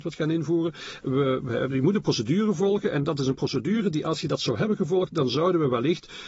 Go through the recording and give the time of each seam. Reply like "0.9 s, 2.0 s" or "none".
none

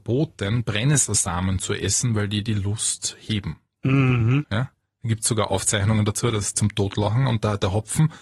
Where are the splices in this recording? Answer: 4.4 s, 6.5 s

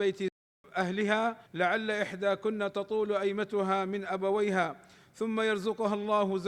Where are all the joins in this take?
1.5 s

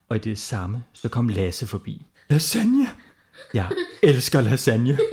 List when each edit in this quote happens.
2.1 s

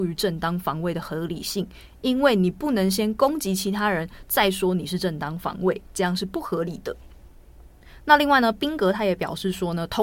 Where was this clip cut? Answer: none

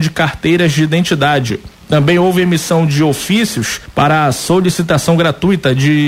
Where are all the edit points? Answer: none

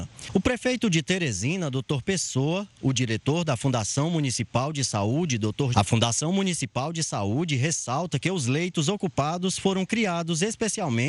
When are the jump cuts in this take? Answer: 5.7 s

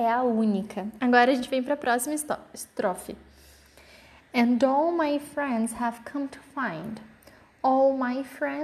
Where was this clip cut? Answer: 1.0 s

